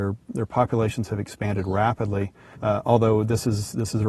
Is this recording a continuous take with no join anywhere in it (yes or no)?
no